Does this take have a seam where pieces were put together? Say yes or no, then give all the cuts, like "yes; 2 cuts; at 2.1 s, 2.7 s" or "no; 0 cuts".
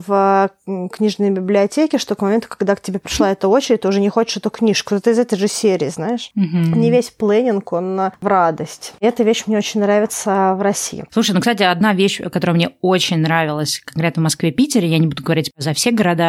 no; 0 cuts